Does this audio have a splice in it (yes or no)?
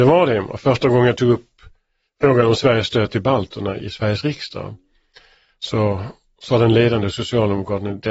yes